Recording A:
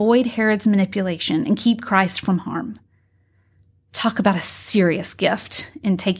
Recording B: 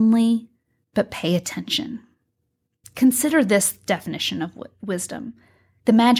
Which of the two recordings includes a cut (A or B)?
B